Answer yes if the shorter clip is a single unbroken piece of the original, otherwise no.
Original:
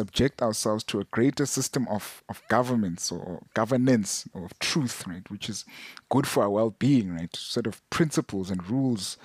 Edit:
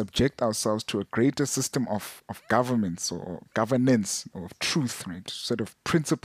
no